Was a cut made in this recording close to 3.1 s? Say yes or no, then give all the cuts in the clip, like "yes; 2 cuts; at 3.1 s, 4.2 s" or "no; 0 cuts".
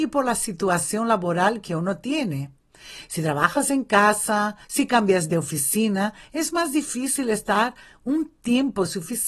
no; 1 cut; at 4.6 s